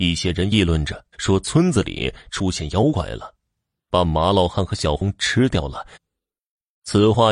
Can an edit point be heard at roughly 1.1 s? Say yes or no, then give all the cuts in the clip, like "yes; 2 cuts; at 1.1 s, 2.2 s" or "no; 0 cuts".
yes; 2 cuts; at 1.1 s, 5.9 s